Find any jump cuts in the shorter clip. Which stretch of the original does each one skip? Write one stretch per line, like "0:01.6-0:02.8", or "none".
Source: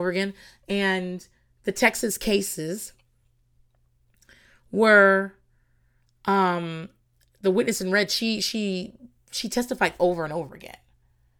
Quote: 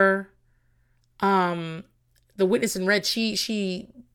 none